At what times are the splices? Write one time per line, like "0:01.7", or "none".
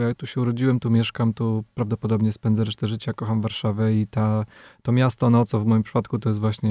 none